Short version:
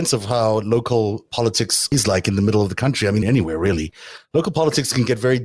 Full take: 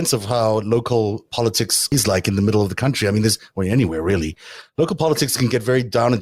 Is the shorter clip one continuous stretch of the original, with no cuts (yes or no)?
no